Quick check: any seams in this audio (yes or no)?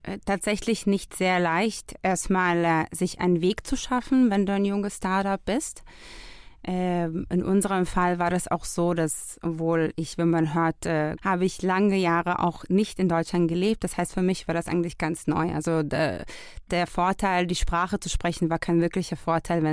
yes